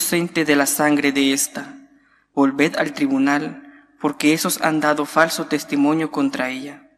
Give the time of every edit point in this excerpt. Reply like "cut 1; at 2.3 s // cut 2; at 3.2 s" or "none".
cut 1; at 2.3 s